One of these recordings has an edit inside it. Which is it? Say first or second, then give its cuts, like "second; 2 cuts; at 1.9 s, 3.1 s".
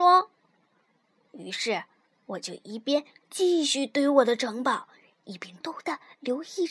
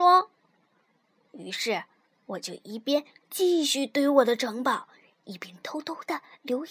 first; 1 cut; at 5.6 s